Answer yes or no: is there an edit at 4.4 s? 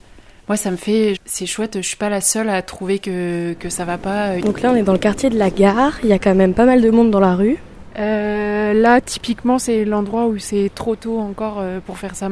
yes